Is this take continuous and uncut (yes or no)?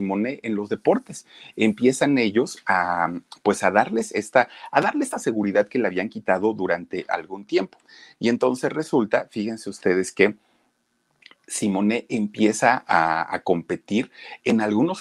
yes